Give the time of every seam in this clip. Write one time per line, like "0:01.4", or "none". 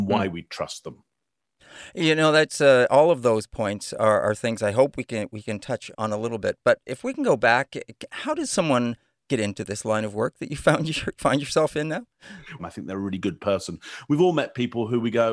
0:05.9
0:12.6